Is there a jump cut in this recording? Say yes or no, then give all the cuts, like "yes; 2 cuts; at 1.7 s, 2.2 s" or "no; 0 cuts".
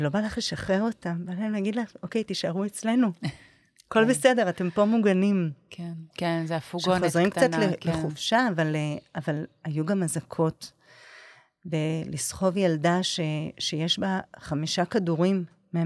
yes; 1 cut; at 6.1 s